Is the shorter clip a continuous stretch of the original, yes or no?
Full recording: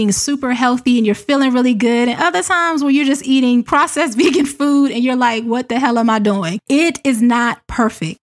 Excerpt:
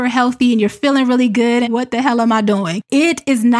no